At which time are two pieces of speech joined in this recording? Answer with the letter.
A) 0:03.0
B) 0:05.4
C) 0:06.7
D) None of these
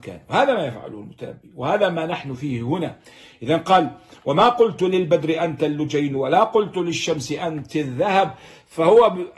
D